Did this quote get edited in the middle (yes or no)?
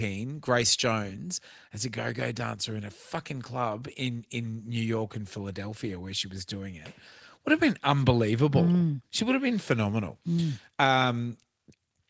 no